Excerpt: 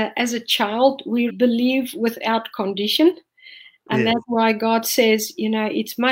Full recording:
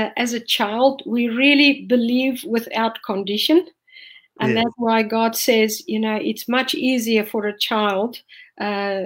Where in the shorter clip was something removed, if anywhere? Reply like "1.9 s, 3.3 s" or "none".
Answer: 1.3 s